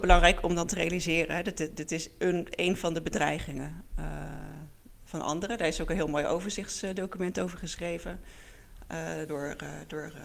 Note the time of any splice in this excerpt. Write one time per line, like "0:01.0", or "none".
none